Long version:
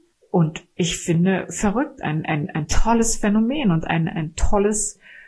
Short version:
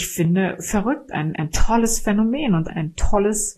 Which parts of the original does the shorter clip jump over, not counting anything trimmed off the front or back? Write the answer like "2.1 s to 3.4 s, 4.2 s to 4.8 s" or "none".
2.3 s to 2.5 s, 3.9 s to 4.1 s